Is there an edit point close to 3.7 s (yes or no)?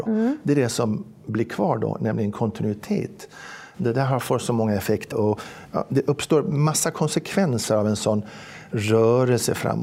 yes